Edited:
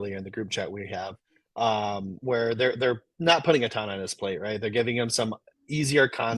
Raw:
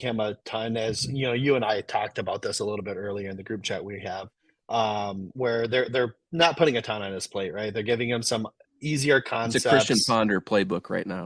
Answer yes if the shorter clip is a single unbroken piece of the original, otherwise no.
yes